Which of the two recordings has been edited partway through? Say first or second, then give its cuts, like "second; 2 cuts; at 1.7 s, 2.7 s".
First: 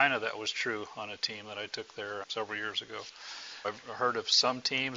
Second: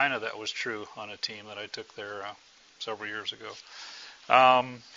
first; 2 cuts; at 2.2 s, 3.6 s